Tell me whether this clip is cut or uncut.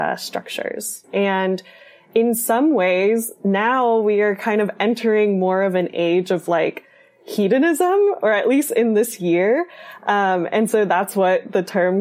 cut